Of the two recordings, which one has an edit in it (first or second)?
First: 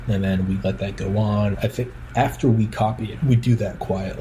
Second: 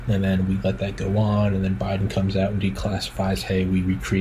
first